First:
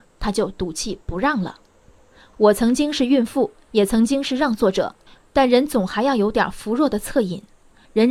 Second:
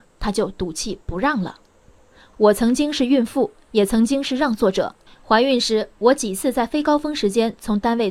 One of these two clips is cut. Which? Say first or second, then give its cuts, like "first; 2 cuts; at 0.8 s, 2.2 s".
first; 1 cut; at 5.2 s